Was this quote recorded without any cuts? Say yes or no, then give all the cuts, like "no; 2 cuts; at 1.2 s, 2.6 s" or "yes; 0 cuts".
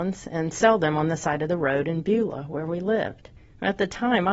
yes; 0 cuts